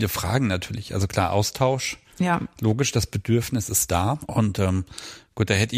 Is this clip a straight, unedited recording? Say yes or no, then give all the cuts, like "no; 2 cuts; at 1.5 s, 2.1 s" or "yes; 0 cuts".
no; 1 cut; at 4.2 s